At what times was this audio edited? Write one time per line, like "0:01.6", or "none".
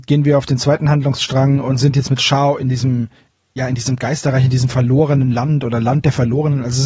none